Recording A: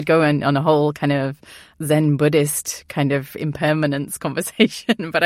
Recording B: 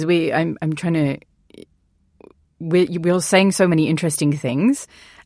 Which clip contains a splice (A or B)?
A